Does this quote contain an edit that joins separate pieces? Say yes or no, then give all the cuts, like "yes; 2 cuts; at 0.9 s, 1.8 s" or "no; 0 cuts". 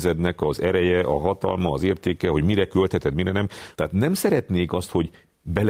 yes; 1 cut; at 3.8 s